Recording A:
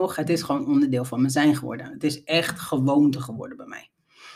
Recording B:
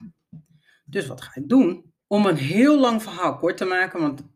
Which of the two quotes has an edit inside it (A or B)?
B